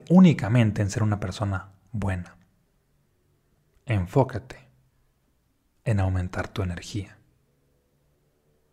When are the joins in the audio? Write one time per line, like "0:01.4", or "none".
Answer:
none